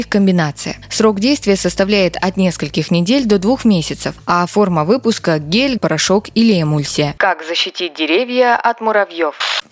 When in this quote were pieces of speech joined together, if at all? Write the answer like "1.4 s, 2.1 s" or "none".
5.8 s, 7.2 s